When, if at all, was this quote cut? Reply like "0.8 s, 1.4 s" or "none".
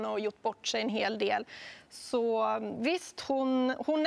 none